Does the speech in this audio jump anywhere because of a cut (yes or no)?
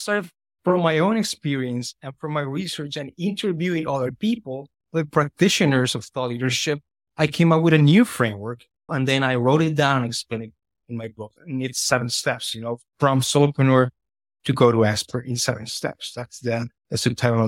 yes